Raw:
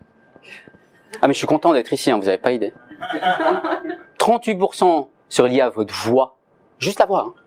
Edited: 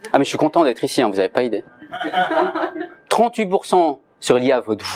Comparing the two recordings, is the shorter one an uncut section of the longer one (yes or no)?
yes